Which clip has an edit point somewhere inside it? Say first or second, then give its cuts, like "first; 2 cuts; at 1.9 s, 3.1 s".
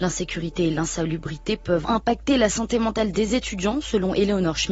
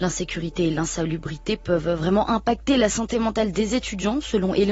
first; 1 cut; at 1.8 s